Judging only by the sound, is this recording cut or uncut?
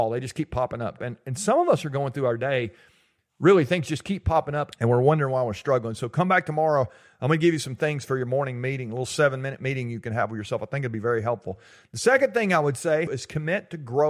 cut